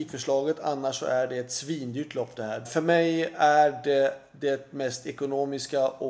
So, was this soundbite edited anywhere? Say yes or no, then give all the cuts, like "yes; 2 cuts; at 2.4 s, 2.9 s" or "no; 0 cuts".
yes; 1 cut; at 2.6 s